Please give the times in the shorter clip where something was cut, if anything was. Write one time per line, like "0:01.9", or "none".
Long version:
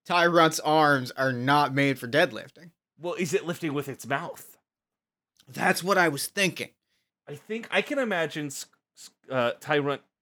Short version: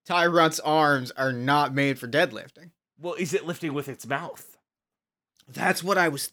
none